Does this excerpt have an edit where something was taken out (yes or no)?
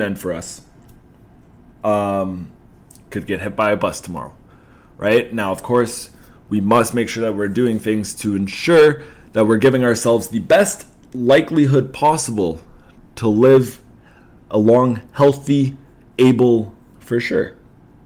yes